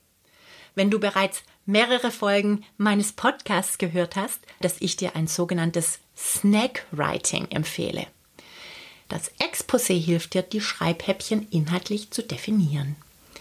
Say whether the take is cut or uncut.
cut